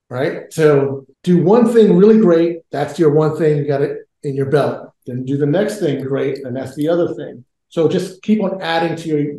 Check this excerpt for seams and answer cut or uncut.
cut